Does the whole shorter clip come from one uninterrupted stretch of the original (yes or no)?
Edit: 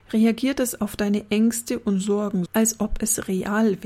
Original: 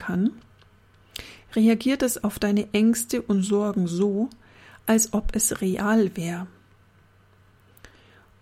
no